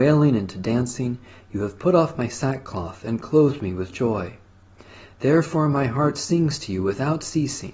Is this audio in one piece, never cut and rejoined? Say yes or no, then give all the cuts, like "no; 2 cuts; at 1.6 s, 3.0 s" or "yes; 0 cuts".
yes; 0 cuts